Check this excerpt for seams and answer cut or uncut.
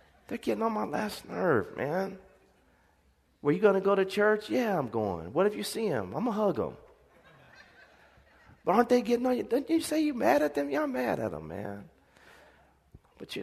uncut